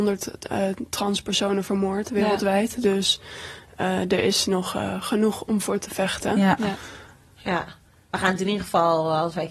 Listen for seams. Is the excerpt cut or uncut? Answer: uncut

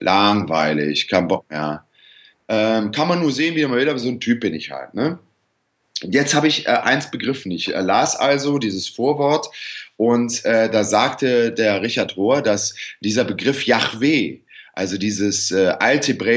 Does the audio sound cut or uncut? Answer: uncut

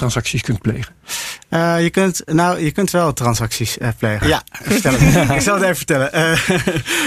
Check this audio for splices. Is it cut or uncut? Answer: cut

